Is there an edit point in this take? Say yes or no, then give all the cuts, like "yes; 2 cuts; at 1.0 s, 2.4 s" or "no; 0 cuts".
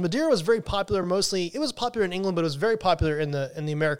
no; 0 cuts